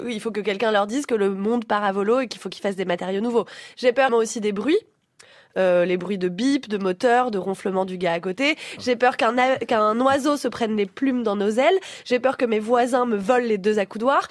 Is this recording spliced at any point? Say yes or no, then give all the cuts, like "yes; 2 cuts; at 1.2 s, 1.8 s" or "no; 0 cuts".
yes; 2 cuts; at 4.1 s, 8.8 s